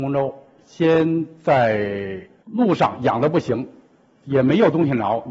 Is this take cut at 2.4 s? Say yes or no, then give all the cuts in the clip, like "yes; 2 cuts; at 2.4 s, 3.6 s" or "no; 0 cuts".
yes; 1 cut; at 2.4 s